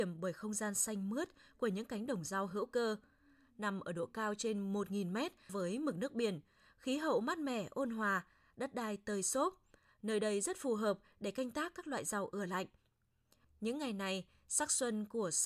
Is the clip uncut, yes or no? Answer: no